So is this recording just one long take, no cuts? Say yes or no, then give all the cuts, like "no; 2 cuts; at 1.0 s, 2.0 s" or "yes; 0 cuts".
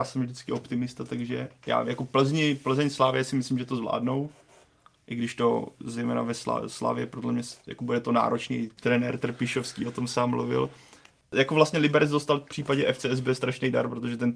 yes; 0 cuts